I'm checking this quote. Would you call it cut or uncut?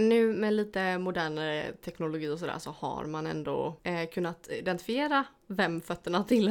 cut